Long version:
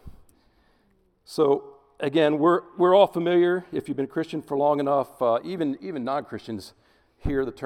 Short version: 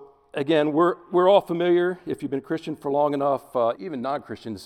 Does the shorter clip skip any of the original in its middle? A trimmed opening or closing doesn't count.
yes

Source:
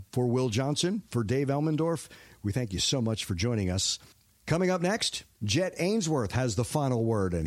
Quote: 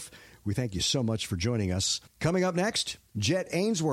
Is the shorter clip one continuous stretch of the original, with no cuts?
no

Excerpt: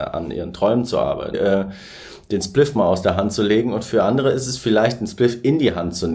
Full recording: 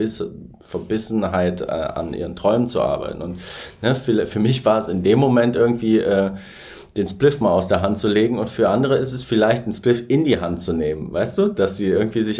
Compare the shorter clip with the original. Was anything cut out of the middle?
yes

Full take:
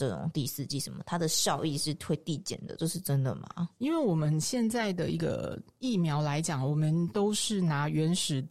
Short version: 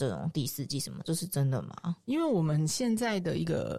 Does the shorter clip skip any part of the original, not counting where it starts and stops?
yes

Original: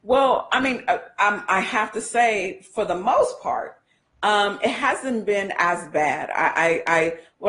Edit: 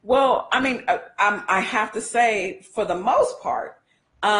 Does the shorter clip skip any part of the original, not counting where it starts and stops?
no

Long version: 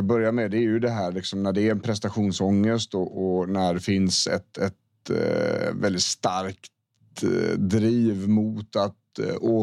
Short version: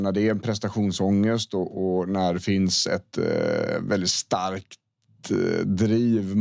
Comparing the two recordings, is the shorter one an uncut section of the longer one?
no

